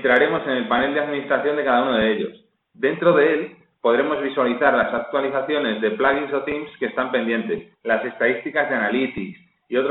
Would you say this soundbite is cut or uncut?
cut